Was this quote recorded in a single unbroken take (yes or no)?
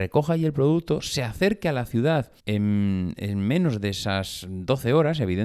no